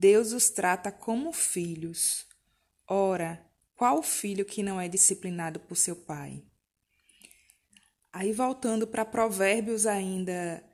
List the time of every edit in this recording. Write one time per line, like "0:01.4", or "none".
none